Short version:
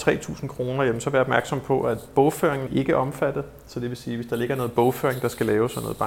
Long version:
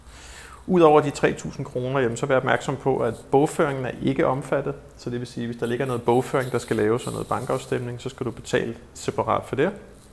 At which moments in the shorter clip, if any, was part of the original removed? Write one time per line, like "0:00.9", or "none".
0:02.7